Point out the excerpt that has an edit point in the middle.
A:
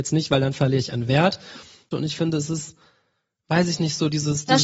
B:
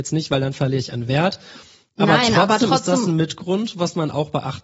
A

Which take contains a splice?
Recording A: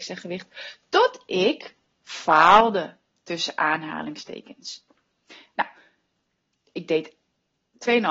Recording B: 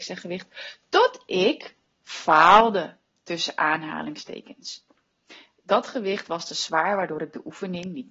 A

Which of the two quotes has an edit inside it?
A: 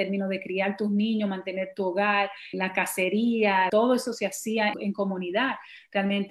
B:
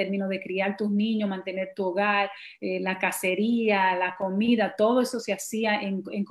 A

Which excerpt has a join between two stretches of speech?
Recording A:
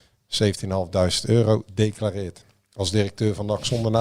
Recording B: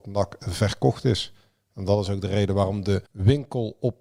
B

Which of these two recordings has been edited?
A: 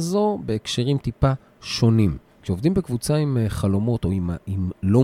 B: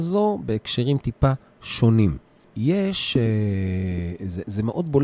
A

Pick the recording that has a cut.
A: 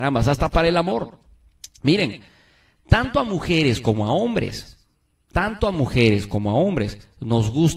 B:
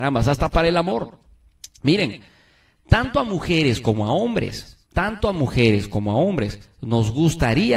B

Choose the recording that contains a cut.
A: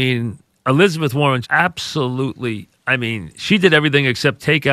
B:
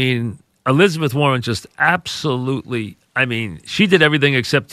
A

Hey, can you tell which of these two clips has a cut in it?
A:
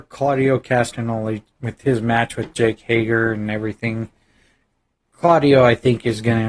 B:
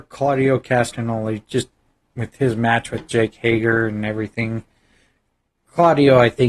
A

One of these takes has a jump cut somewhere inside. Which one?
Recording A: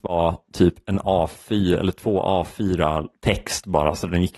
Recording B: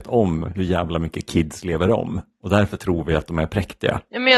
A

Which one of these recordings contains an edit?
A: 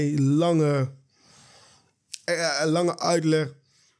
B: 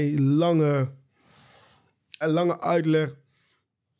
B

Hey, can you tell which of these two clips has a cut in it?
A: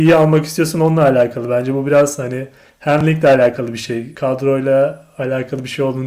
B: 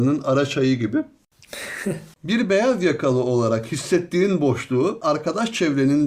B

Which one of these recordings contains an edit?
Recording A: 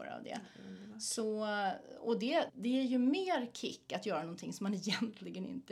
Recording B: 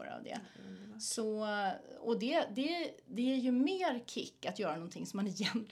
A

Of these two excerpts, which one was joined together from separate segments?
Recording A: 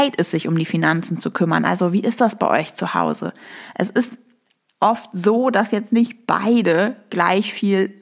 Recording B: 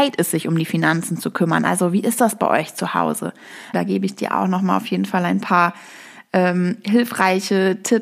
B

